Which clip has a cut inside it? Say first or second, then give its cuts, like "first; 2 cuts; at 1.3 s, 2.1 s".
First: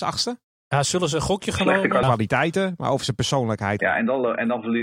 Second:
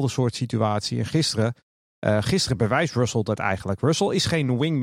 first; 2 cuts; at 2.0 s, 3.8 s